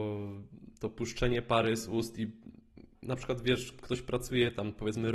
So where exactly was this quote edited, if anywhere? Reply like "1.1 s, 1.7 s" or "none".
3.7 s